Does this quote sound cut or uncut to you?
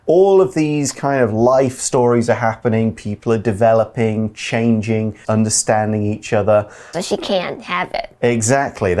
cut